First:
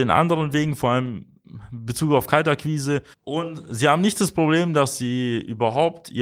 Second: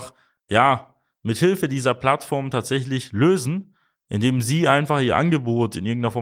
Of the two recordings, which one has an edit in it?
first; 1 cut; at 3.1 s

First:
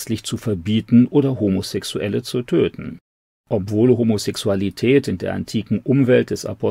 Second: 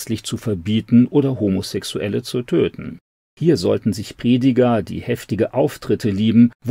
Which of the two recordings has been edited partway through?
first; 1 cut; at 3.3 s

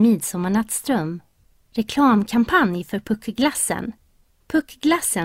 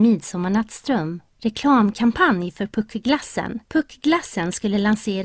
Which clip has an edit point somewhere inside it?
second; 2 cuts; at 1.3 s, 3.6 s

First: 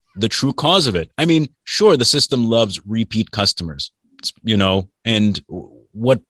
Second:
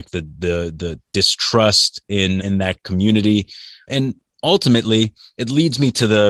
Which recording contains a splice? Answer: second; 2 cuts; at 2.4 s, 3.9 s

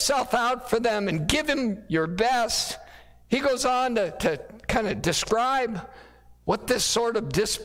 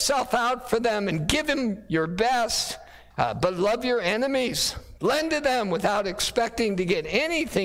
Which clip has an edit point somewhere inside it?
second; 2 cuts; at 3.1 s, 5.0 s

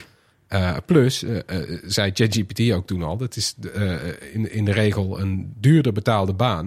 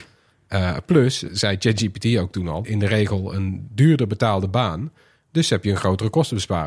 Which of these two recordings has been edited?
second; 2 cuts; at 1.3 s, 2.6 s

